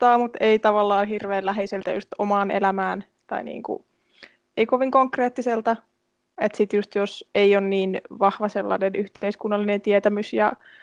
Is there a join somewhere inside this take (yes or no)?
no